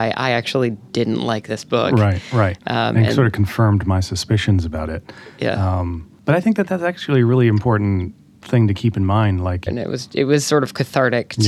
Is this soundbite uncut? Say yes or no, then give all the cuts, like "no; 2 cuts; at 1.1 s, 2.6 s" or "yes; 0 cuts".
no; 1 cut; at 9.7 s